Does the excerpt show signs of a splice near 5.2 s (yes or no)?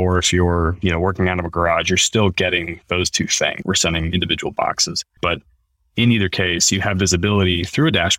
yes